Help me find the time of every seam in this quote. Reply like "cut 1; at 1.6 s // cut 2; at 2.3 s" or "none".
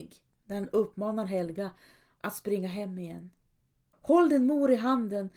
cut 1; at 3.9 s